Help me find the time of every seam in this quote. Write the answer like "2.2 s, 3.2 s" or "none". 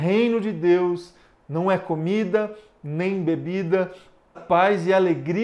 4.3 s